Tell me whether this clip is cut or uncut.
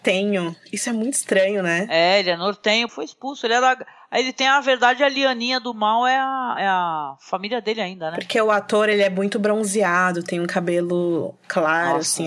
uncut